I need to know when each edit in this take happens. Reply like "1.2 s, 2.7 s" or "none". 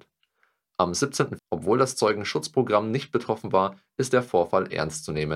1.4 s